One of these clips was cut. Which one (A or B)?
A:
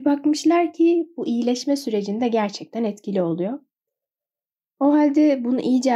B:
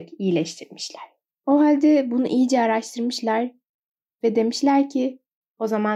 B